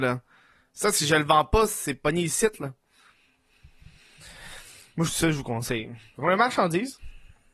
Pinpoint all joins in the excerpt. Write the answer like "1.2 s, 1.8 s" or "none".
none